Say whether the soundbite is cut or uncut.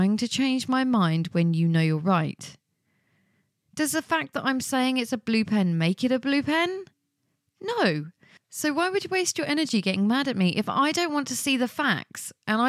uncut